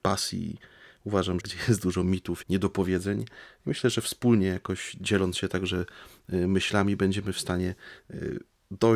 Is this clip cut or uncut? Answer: cut